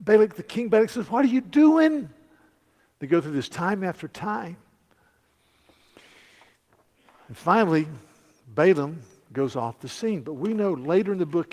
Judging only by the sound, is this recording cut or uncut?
uncut